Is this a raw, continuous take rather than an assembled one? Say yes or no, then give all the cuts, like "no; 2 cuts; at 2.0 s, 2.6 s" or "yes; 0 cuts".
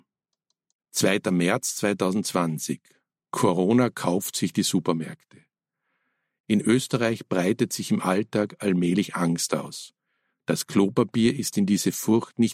yes; 0 cuts